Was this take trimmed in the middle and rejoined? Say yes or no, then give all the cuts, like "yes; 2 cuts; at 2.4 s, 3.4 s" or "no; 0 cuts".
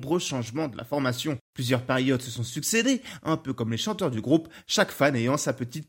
no; 0 cuts